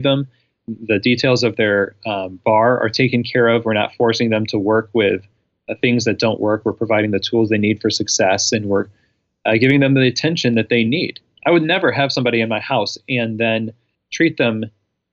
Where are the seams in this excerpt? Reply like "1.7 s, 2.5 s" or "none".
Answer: none